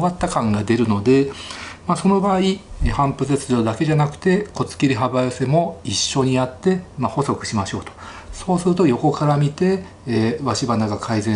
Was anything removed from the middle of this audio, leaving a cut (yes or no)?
no